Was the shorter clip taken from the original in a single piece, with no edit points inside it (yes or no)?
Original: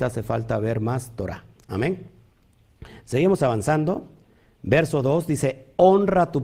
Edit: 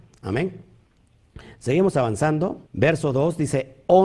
no